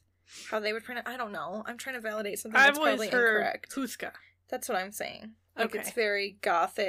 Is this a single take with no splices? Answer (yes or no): no